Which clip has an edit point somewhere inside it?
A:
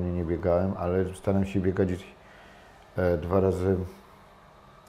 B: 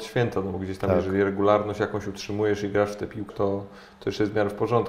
B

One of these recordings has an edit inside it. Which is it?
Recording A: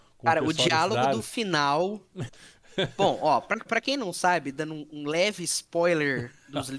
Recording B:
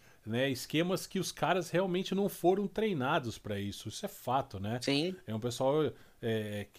A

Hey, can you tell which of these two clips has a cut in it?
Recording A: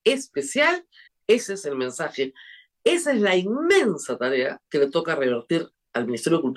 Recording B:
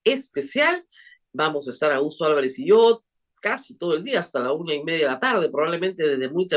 A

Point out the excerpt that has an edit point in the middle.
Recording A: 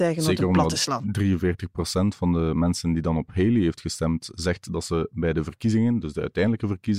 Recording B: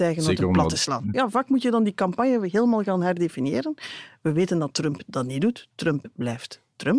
B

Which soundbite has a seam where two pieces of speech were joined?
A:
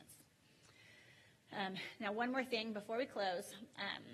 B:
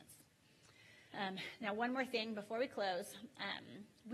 B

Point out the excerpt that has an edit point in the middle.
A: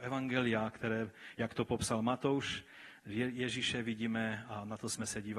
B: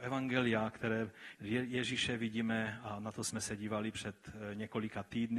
B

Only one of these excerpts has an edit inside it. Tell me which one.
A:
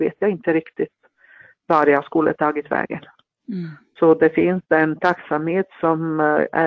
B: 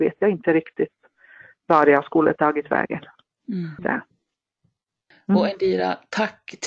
B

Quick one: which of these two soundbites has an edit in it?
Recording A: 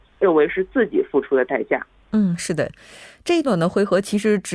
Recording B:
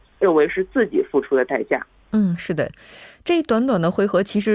A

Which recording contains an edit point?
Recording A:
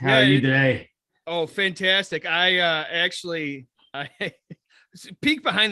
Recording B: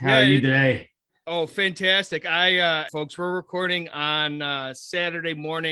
B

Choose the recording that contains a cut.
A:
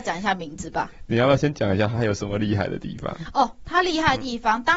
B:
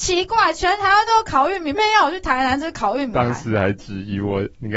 B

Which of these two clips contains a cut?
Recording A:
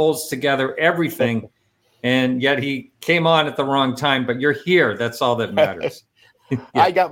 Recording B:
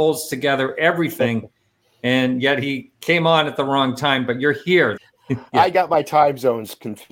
B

